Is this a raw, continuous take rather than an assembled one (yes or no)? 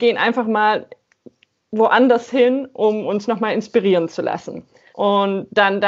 no